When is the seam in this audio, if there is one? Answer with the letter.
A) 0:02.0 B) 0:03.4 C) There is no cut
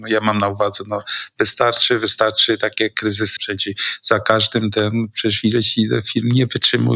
B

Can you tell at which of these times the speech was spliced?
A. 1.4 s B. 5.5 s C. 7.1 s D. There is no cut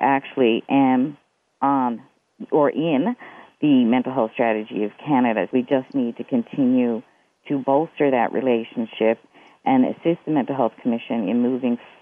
B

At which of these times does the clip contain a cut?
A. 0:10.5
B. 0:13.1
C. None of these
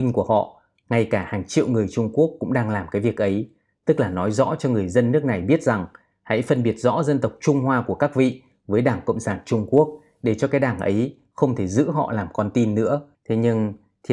B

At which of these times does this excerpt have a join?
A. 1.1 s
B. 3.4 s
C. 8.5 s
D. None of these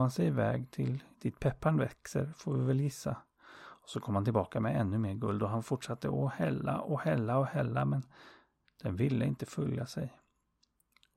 A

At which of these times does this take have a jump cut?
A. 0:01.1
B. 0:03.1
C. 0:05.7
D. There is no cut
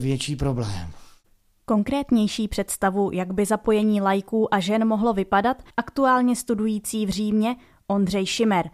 C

